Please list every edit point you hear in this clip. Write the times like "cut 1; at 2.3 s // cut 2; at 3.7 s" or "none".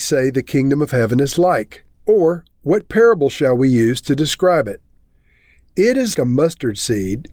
cut 1; at 1.9 s // cut 2; at 6.1 s